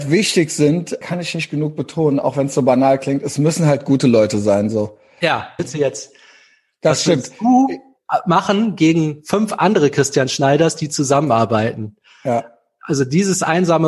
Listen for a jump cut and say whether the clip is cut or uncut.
cut